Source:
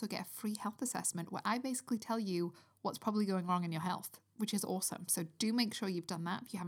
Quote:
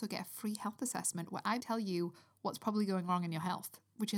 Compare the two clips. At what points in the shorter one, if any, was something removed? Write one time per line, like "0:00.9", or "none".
0:01.6